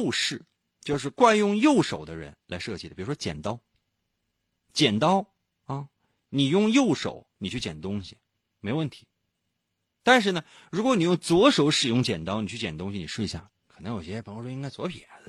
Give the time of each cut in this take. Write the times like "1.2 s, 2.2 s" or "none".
13.5 s